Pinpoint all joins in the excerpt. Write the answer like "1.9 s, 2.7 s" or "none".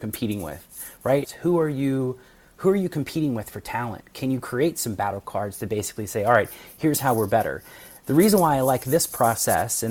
1.2 s